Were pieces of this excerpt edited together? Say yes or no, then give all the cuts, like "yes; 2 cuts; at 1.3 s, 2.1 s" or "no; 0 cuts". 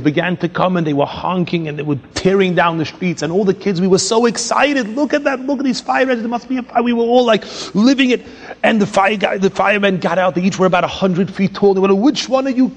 no; 0 cuts